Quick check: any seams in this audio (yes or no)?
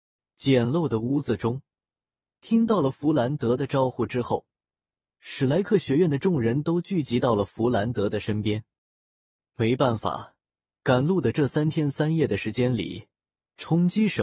no